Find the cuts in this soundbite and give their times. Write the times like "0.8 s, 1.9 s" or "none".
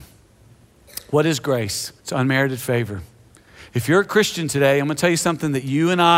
2.0 s

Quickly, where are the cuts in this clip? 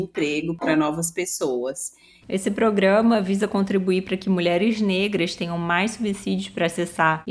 2.2 s

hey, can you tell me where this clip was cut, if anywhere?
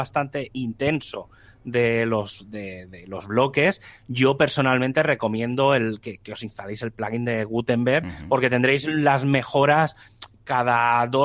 none

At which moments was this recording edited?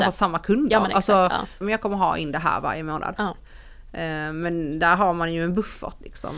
1.6 s, 3.2 s

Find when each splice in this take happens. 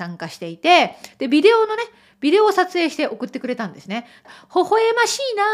4.2 s

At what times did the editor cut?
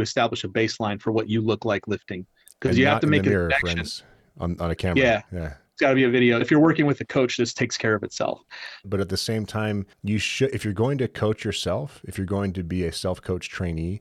6.4 s, 8.8 s, 9.9 s

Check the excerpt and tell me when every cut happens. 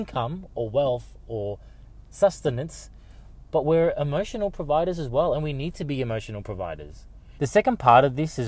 7.4 s

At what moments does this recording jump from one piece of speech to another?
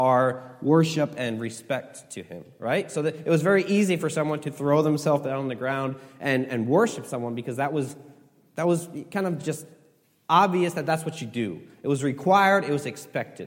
none

